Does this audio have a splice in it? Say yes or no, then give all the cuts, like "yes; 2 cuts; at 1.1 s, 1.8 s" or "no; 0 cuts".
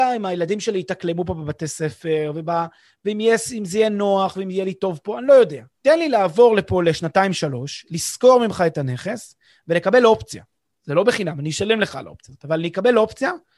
yes; 1 cut; at 5.7 s